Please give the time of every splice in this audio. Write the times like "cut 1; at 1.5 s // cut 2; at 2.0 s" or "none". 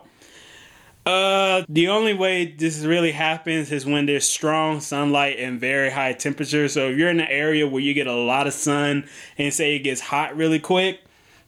cut 1; at 1.6 s